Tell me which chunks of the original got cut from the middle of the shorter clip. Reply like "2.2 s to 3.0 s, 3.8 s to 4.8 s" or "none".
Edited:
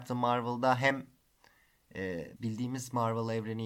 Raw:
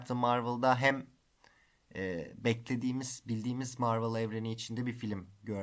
2.4 s to 3.2 s